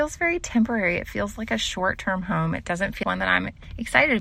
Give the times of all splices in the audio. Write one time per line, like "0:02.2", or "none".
0:03.0